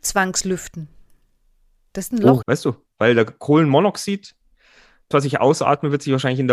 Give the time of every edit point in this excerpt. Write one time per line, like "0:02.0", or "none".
0:02.4
0:05.1